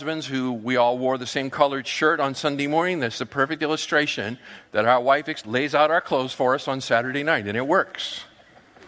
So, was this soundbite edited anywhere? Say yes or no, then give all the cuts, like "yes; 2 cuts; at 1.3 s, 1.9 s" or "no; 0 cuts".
no; 0 cuts